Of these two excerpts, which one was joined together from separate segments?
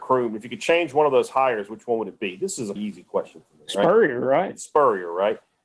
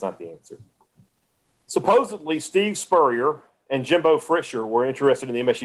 first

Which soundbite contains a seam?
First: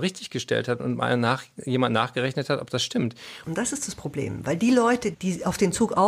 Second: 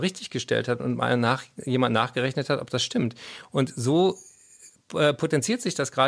first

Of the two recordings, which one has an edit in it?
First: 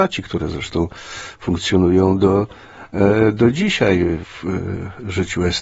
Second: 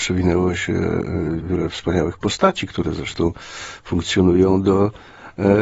second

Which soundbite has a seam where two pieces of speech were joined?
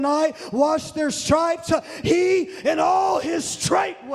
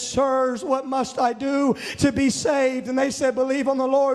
first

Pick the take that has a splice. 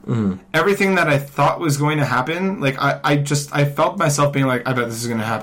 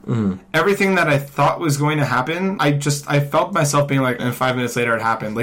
second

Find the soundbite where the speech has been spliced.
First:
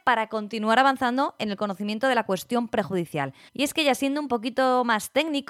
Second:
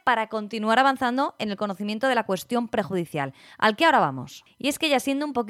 first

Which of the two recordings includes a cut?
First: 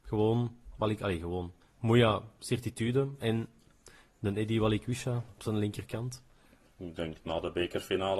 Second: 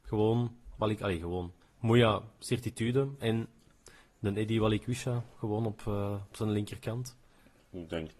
first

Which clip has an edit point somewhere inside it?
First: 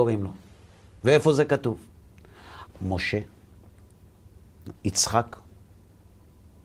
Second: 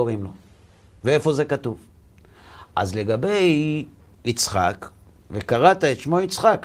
first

